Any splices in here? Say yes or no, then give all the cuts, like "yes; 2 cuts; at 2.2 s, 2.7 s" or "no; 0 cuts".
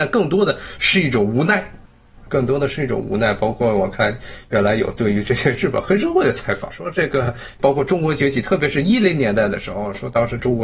no; 0 cuts